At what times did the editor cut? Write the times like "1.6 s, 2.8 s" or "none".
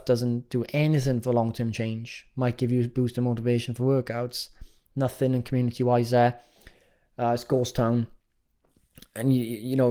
none